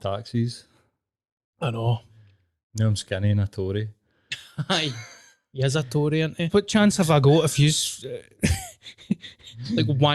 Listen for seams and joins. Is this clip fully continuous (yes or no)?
no